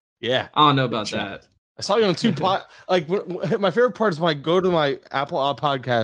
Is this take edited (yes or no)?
no